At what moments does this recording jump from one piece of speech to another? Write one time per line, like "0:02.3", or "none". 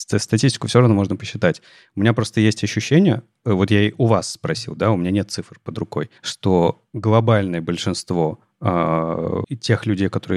0:06.2
0:09.4

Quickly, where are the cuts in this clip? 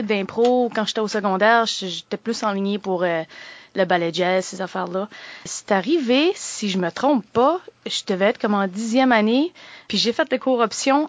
none

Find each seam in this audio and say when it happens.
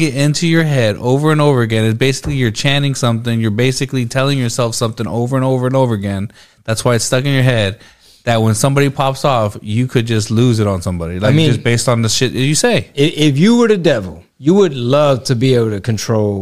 0:14.3

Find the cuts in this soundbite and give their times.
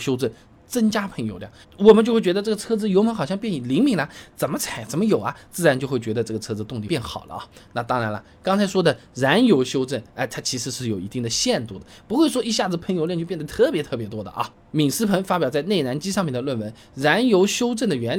0:01.6

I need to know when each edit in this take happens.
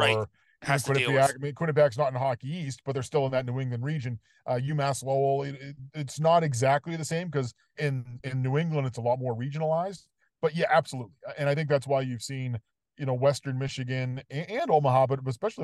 0:07.8

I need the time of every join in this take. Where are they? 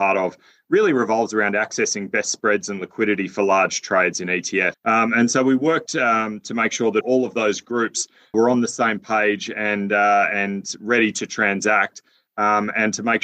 0:04.7
0:07.0
0:08.3

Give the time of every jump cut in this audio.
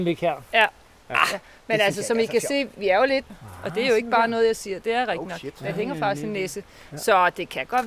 0:03.3

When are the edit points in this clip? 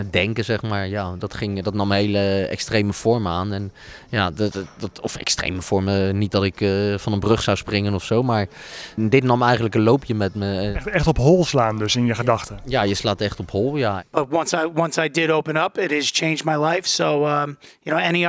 0:01.2

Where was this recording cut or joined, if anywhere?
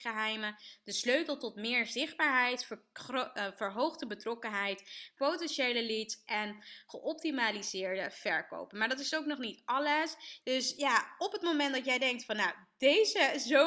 0:05.2
0:10.4

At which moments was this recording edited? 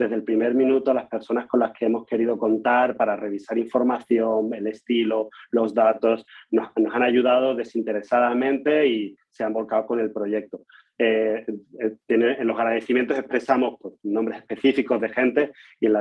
none

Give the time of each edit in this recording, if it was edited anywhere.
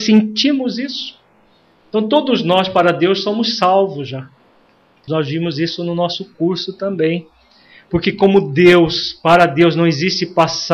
0:01.8
0:05.1

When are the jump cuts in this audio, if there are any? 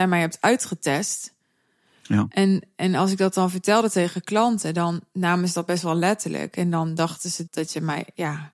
0:07.5

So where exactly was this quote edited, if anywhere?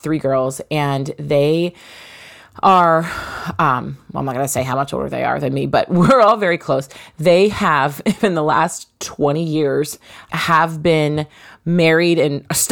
0:07.1
0:10.3

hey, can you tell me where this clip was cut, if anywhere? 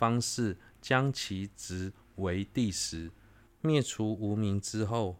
0:03.4

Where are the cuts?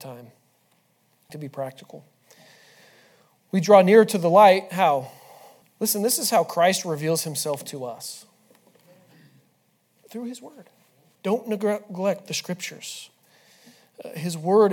0:01.3
0:05.6
0:11.2

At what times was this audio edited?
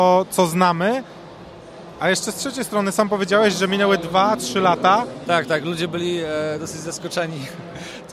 0:05.3

